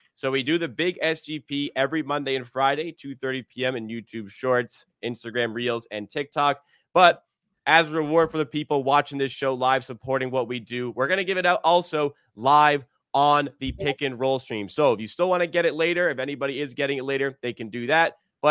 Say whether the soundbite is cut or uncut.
uncut